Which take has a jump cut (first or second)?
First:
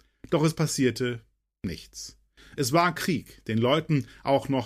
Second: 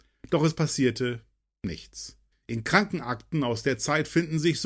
second